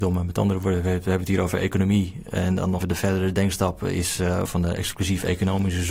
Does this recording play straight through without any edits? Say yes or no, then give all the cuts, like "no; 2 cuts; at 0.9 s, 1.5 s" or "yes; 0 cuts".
no; 2 cuts; at 2.8 s, 4.5 s